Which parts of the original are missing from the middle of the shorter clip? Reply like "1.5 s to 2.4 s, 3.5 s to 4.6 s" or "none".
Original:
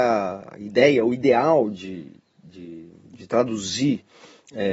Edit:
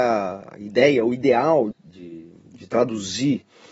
1.7 s to 2.3 s